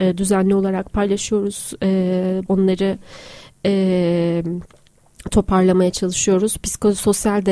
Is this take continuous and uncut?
no; 1 cut; at 2.5 s

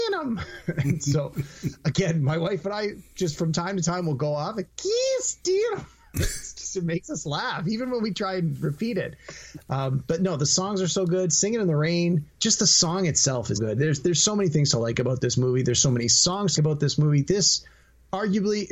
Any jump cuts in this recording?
yes; 3 cuts; at 12.3 s, 13.5 s, 16.6 s

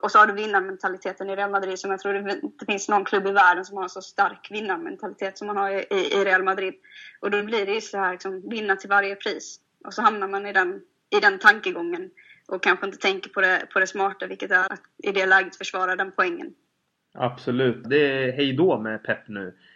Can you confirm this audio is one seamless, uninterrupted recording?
no; 2 cuts; at 14.7 s, 17.8 s

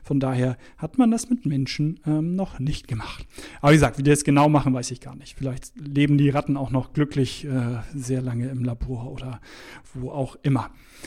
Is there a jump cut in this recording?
no; 0 cuts

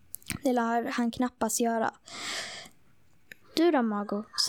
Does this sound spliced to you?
yes; 1 cut; at 3.4 s

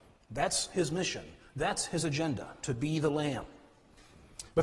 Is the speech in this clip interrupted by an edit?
no; 0 cuts

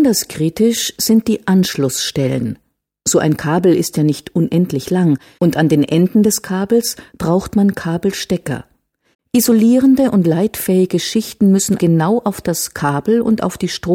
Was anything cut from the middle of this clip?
yes; 3 cuts; at 5.4 s, 9.1 s, 11.8 s

